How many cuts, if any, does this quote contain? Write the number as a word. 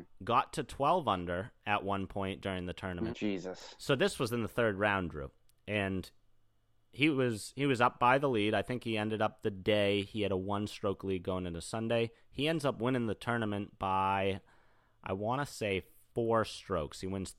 one